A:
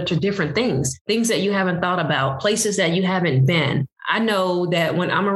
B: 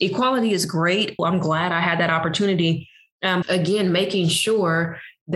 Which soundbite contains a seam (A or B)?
B